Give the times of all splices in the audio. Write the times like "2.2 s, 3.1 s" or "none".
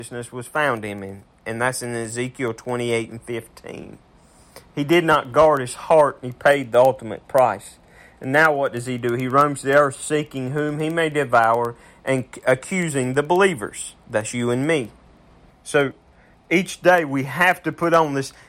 15.5 s